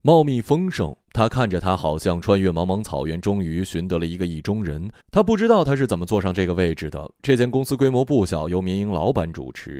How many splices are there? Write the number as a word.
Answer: two